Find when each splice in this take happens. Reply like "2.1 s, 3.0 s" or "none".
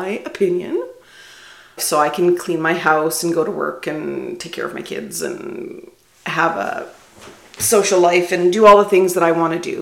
1.8 s